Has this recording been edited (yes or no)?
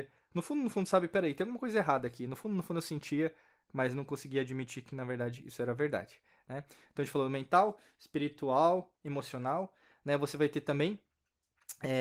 no